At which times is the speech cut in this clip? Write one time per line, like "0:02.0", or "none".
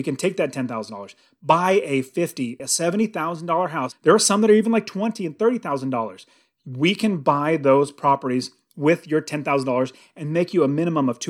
0:02.6
0:03.9